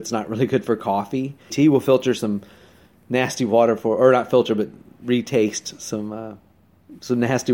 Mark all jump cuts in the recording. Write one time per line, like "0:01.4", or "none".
0:01.5